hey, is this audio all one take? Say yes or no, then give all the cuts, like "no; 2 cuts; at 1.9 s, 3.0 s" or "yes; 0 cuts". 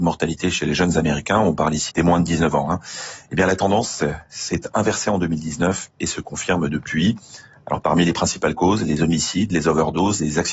no; 1 cut; at 1.9 s